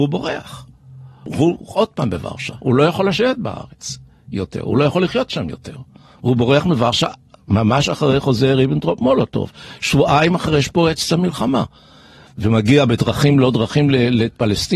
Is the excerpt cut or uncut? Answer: uncut